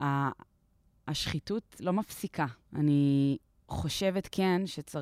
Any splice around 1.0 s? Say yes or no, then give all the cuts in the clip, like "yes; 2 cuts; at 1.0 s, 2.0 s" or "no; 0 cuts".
no; 1 cut; at 2.6 s